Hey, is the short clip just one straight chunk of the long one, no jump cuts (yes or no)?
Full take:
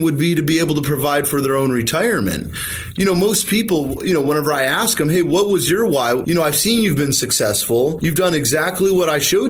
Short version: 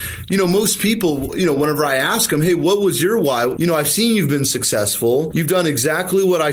yes